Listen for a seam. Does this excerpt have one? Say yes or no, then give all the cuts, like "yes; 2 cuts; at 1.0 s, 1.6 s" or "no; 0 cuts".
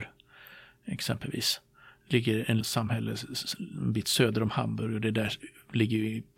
yes; 1 cut; at 2.6 s